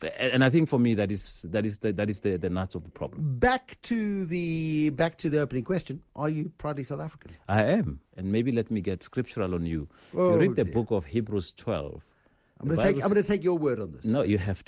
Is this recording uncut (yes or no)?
no